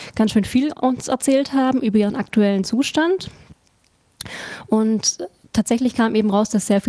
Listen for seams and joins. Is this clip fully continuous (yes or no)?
yes